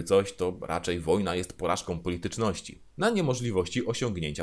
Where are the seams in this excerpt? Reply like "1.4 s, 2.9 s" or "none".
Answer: 2.9 s